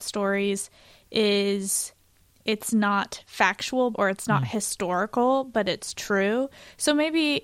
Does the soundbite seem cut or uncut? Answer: cut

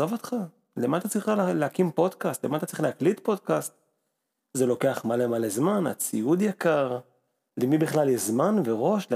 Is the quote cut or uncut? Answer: uncut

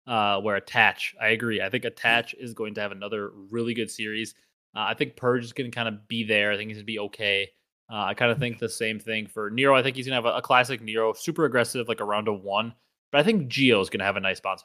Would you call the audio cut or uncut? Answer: uncut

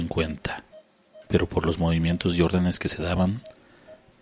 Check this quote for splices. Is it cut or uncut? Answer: cut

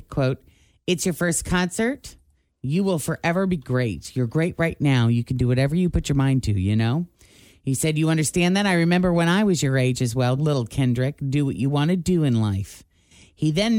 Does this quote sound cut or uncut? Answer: cut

